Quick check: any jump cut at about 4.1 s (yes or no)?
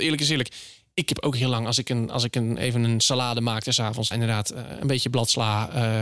yes